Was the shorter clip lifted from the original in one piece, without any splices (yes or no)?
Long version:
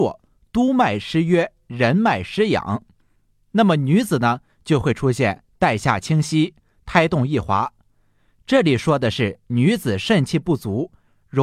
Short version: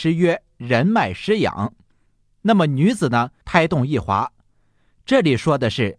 no